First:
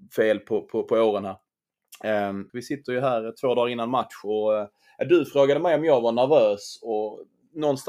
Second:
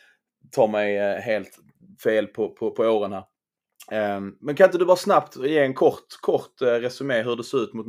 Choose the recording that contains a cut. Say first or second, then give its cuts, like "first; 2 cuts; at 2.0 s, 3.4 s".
first; 1 cut; at 2.5 s